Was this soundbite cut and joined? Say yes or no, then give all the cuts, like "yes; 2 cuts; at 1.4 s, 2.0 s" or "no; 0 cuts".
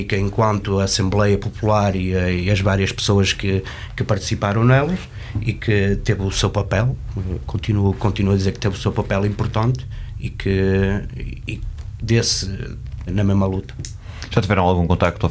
yes; 2 cuts; at 12.0 s, 13.1 s